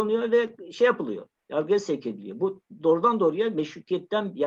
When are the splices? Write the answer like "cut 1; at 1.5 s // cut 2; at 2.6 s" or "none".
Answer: cut 1; at 1.4 s